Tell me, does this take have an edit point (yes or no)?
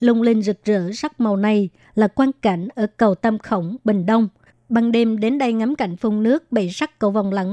yes